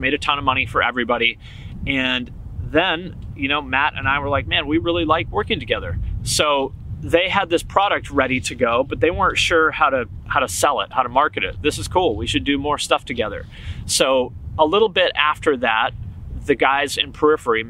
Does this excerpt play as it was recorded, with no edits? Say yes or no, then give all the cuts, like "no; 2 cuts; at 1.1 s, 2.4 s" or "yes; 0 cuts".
no; 2 cuts; at 6.2 s, 11.6 s